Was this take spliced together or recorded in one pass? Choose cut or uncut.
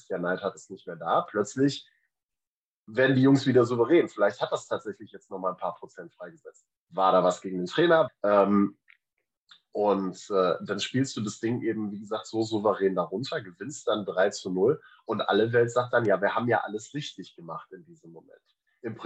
cut